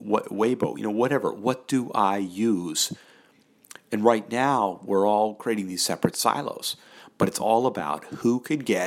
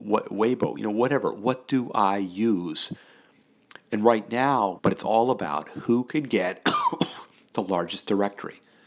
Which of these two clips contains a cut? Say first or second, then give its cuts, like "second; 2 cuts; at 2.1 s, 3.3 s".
second; 1 cut; at 4.8 s